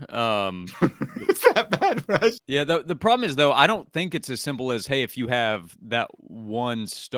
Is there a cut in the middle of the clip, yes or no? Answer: yes